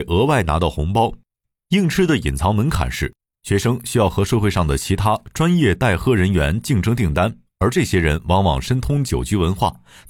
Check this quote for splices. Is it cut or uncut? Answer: uncut